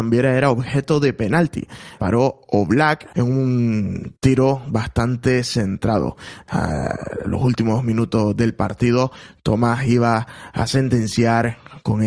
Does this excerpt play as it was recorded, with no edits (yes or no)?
no